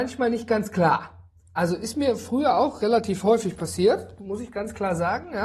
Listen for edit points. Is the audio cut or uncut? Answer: uncut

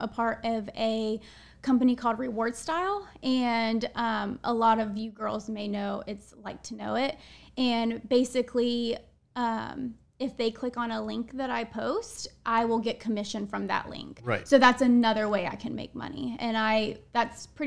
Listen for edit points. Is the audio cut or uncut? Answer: uncut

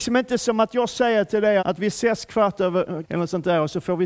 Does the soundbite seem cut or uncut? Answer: cut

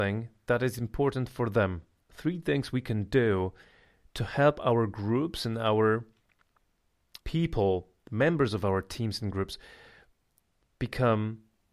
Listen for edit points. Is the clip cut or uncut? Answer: cut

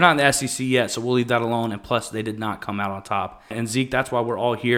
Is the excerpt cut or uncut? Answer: cut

